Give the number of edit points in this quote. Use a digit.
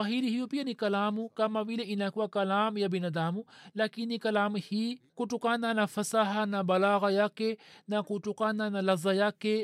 1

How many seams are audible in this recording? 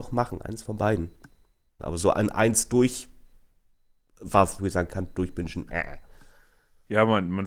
2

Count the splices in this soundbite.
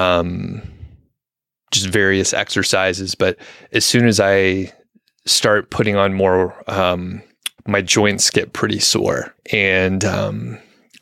2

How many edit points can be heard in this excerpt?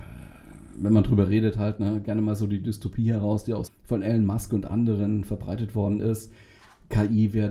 1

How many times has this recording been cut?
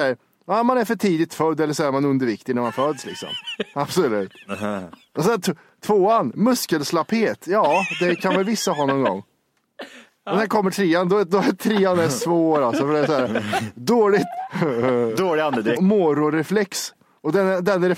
2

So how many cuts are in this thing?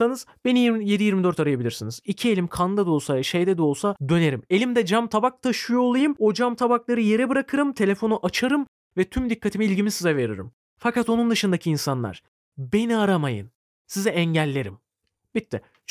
0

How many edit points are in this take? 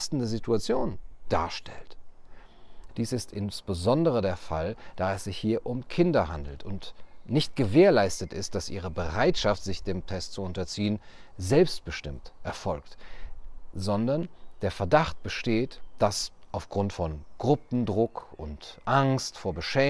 1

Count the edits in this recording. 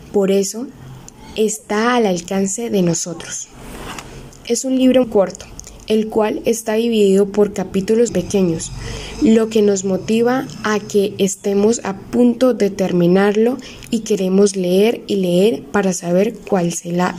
2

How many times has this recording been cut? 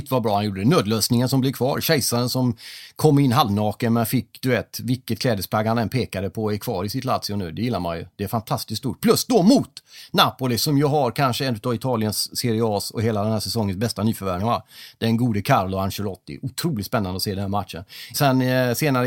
2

